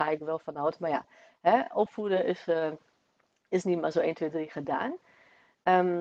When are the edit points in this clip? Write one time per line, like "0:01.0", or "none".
none